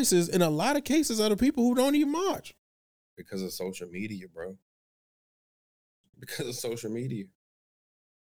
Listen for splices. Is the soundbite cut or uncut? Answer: uncut